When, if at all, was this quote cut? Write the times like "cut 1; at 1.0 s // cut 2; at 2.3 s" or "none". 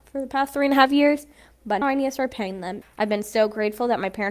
cut 1; at 1.8 s // cut 2; at 2.8 s